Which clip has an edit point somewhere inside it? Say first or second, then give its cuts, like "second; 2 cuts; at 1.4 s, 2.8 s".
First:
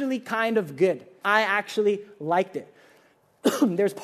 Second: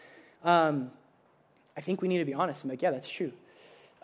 first; 1 cut; at 1.2 s